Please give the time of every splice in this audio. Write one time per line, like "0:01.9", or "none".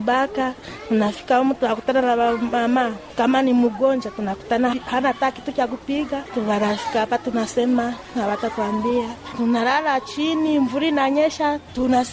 0:06.3